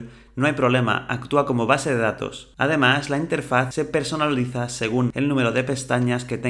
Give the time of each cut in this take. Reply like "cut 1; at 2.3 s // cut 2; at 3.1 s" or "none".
none